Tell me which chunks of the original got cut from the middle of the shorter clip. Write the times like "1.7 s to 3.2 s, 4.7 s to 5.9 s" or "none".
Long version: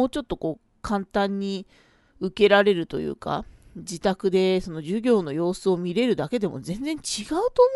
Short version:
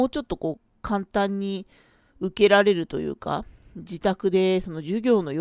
none

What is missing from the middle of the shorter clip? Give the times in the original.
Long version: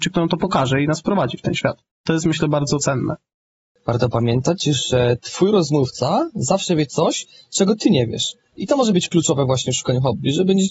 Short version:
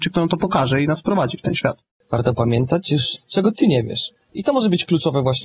1.9 s to 3.7 s, 4.9 s to 7.4 s

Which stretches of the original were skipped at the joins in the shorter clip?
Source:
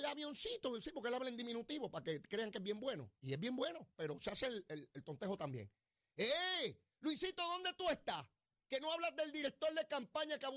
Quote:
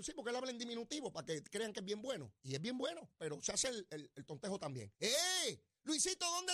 5.7 s to 6.1 s

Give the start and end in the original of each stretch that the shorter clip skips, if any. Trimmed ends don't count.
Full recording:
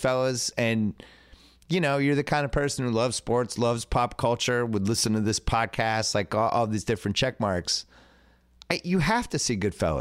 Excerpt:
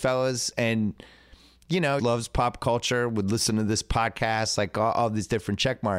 2.0 s to 3.6 s

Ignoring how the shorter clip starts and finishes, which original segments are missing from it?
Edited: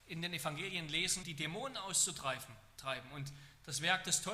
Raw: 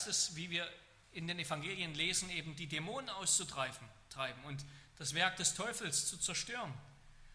2.3 s to 2.5 s

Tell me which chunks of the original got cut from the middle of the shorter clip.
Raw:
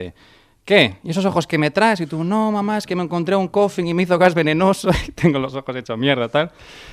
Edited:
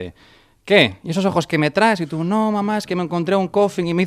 none

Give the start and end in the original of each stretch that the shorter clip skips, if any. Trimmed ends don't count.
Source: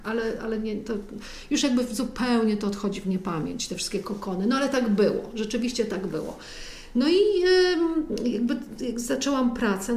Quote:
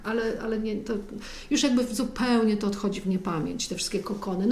none

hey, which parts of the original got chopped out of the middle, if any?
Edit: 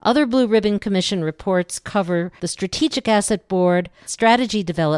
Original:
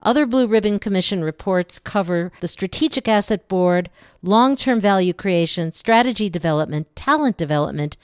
4.1 s to 5.7 s

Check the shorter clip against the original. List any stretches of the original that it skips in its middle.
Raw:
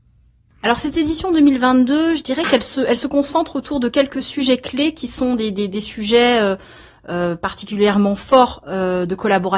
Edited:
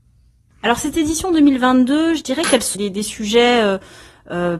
2.7 s to 5.5 s

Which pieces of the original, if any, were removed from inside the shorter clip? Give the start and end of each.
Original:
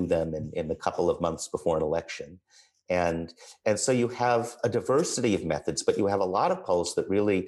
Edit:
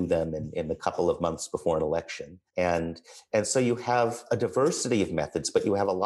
2.5 s to 2.8 s

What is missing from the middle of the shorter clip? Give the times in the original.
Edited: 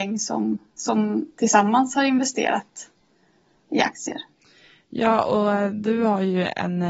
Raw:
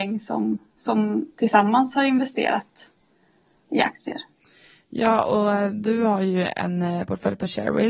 none

